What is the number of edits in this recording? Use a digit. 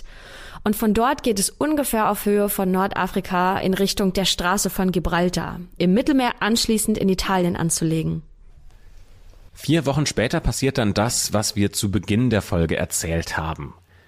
1